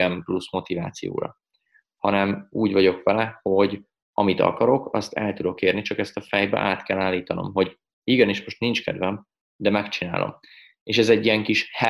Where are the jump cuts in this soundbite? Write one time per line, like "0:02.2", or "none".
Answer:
none